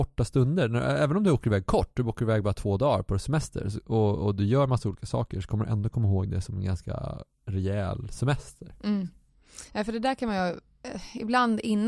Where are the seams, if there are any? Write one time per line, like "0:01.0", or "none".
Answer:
none